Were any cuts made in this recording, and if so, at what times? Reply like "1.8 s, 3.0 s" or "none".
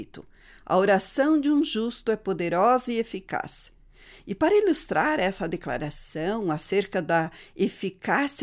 none